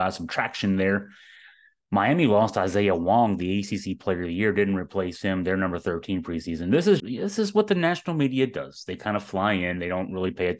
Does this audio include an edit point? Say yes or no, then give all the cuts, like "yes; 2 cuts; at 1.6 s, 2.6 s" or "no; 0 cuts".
yes; 1 cut; at 7.0 s